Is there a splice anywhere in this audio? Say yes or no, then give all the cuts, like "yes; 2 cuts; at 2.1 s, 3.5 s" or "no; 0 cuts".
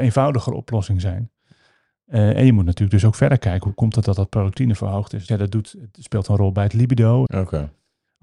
yes; 2 cuts; at 5.3 s, 7.3 s